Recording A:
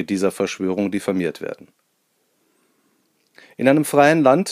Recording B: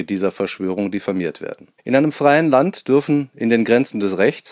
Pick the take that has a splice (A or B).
B